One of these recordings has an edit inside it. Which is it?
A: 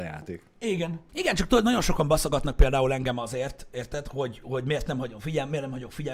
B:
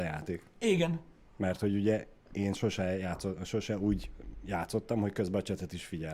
A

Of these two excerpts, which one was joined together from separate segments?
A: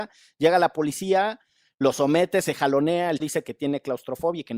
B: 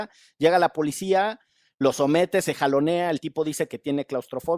A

